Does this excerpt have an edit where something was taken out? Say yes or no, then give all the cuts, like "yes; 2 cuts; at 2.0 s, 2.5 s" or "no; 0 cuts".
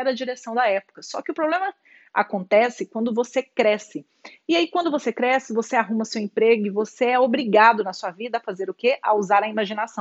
no; 0 cuts